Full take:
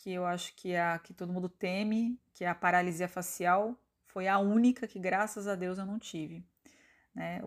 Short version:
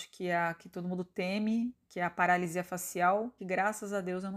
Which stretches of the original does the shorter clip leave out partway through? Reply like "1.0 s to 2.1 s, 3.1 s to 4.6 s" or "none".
3.8 s to 4.9 s